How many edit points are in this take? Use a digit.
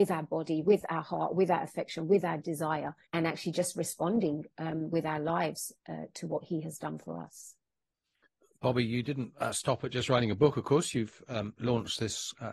1